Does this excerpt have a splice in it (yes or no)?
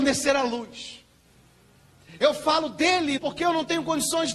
yes